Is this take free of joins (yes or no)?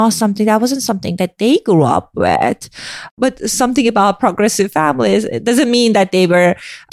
no